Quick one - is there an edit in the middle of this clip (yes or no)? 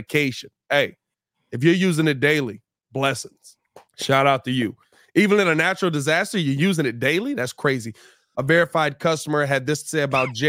yes